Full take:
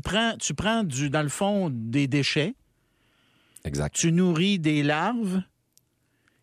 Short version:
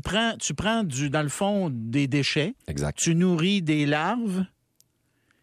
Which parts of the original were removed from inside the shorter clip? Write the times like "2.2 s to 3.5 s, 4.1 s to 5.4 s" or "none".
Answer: 2.6 s to 3.6 s